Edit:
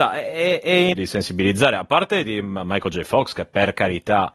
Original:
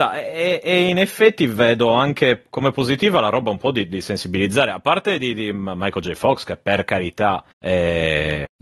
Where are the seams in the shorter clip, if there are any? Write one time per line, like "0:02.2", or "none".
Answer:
0:00.9
0:02.2